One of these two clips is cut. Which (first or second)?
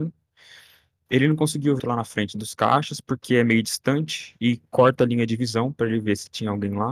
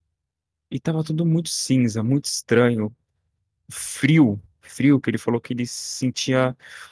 first